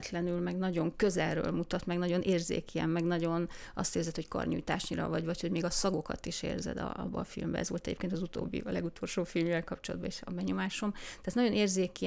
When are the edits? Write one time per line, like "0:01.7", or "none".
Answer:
none